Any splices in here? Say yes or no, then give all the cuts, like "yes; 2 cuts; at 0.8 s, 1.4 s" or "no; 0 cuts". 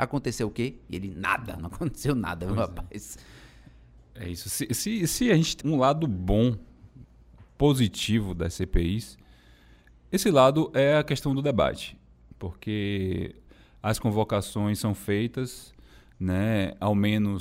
yes; 1 cut; at 5.6 s